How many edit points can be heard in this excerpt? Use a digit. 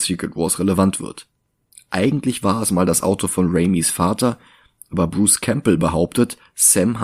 1